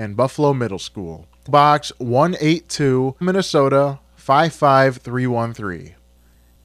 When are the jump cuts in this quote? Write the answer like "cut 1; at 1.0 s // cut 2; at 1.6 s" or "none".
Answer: cut 1; at 1.5 s // cut 2; at 3.2 s